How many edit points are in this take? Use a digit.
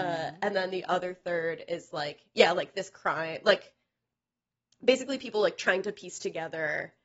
0